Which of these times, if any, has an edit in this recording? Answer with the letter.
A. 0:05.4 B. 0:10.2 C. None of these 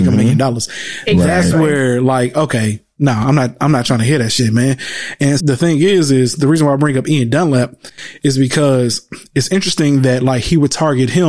A